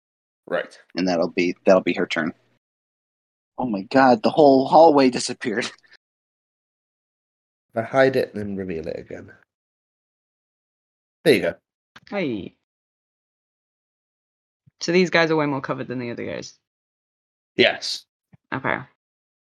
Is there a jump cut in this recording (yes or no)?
yes